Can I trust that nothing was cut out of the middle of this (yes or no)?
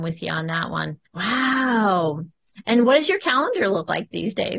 no